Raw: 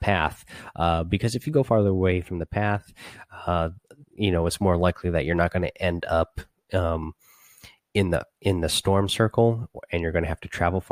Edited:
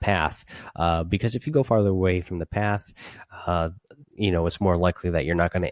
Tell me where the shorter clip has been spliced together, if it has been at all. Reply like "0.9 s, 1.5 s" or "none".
none